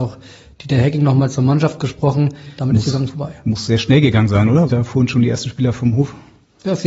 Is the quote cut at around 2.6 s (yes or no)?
yes